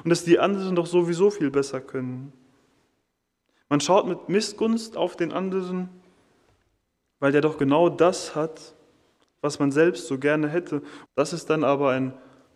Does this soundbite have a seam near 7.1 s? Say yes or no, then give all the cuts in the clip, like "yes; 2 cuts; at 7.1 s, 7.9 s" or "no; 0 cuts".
no; 1 cut; at 11.0 s